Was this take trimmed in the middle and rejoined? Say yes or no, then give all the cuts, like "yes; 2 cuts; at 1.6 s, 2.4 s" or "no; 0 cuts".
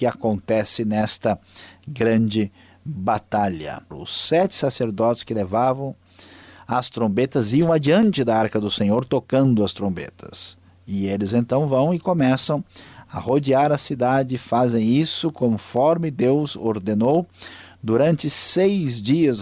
yes; 1 cut; at 3.9 s